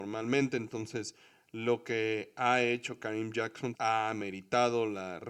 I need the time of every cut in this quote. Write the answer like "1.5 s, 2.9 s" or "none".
3.7 s